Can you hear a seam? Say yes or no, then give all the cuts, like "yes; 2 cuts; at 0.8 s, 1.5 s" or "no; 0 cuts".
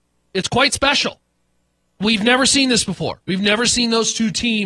no; 0 cuts